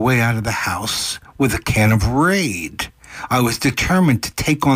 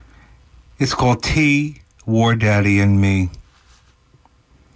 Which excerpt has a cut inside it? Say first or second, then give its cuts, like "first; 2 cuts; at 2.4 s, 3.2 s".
second; 1 cut; at 2.0 s